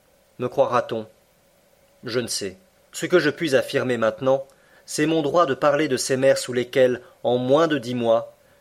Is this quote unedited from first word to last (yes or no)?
no